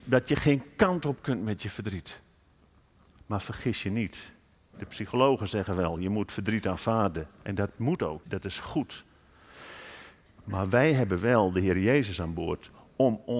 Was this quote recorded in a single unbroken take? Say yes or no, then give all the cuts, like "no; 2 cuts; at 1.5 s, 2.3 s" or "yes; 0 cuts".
no; 1 cut; at 8.2 s